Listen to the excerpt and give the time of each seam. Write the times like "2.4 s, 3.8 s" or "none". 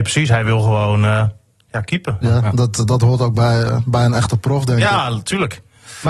2.2 s